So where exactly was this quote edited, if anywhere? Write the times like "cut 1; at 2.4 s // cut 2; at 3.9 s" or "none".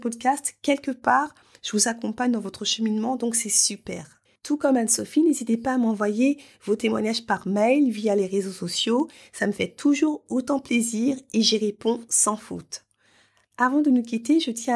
none